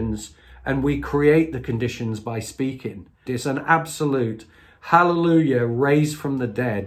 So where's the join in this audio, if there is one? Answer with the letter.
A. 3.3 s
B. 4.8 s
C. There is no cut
A